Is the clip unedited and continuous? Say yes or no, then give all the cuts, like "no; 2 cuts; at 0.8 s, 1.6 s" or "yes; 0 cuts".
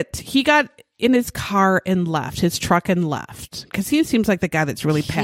no; 1 cut; at 3.7 s